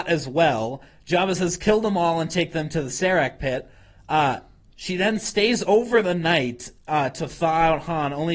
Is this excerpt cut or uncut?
cut